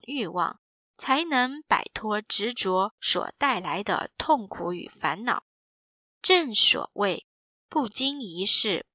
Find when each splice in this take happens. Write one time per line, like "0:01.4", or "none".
0:06.0